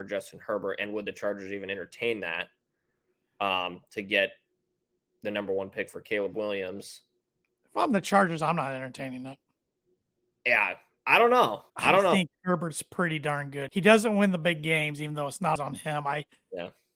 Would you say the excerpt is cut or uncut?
cut